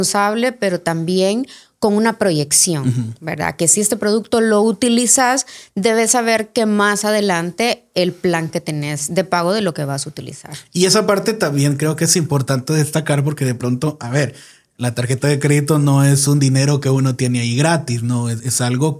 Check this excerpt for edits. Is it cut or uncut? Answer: uncut